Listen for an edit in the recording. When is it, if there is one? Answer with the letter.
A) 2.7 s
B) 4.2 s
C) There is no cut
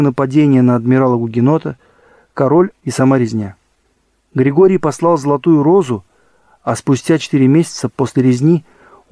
A